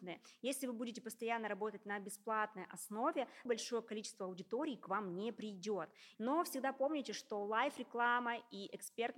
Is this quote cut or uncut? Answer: cut